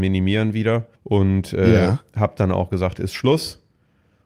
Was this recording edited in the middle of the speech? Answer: yes; 1 cut; at 1.0 s

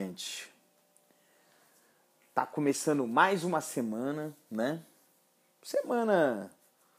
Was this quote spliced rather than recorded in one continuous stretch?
no; 0 cuts

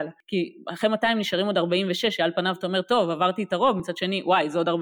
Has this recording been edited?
no; 0 cuts

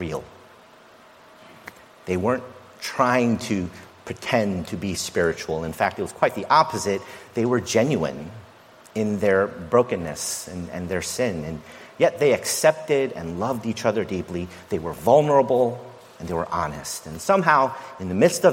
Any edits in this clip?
no; 0 cuts

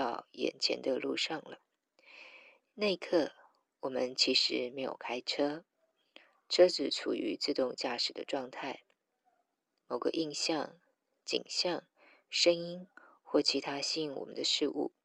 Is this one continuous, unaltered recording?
yes; 0 cuts

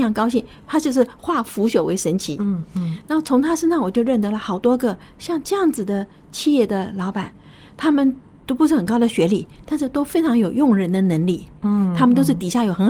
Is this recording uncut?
yes; 0 cuts

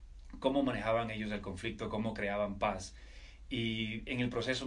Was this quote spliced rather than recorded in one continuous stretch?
no; 0 cuts

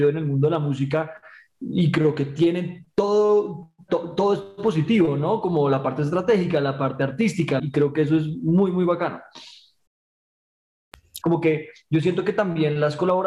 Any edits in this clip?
yes; 3 cuts; at 3.9 s, 7.6 s, 11.2 s

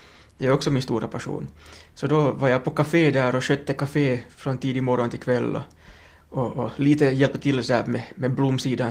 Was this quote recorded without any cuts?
yes; 0 cuts

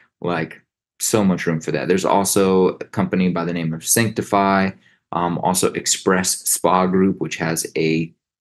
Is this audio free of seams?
yes; 0 cuts

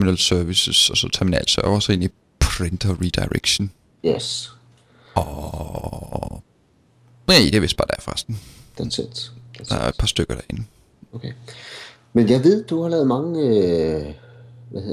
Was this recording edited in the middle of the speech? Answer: no; 0 cuts

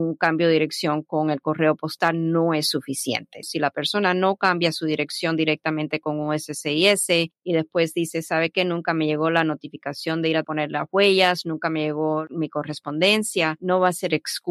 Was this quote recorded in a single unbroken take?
yes; 0 cuts

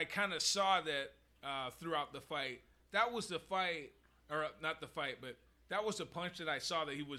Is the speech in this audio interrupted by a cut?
no; 0 cuts

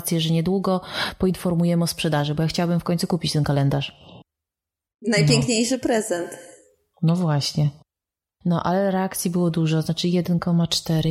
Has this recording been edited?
no; 0 cuts

